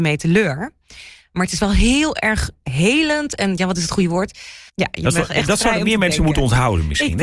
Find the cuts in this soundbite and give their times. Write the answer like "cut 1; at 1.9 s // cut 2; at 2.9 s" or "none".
cut 1; at 4.7 s